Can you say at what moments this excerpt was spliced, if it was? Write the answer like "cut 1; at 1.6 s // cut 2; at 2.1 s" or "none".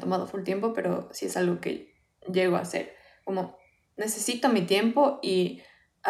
none

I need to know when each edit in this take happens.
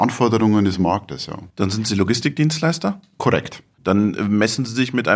none

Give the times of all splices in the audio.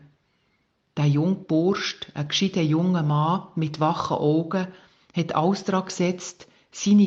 none

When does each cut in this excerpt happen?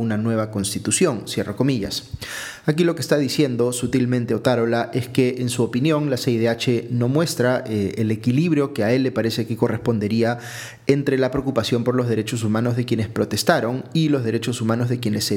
none

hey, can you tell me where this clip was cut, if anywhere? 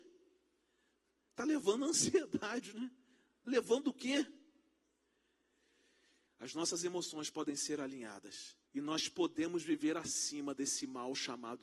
cut 1; at 6.3 s // cut 2; at 8.7 s

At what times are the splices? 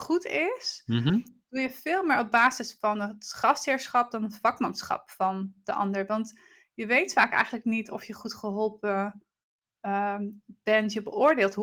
none

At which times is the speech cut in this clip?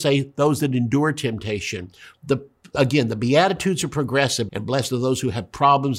cut 1; at 2.1 s // cut 2; at 4.5 s

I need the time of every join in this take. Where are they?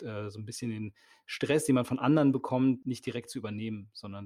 cut 1; at 2.8 s

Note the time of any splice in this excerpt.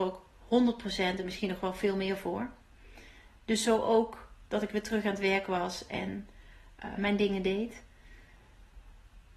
cut 1; at 7.0 s

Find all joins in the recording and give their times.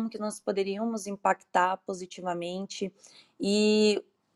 none

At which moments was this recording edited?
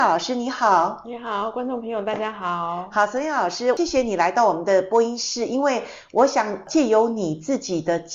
none

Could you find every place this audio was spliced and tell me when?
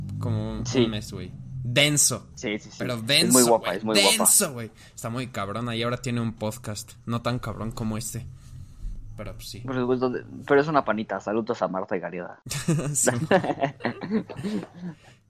none

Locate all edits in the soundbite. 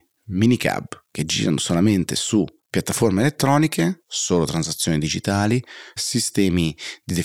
cut 1; at 4.0 s // cut 2; at 6.0 s

